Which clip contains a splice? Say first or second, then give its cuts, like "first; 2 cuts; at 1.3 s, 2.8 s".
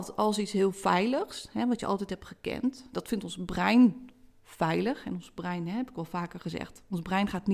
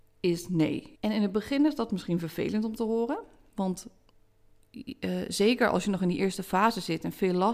second; 1 cut; at 0.9 s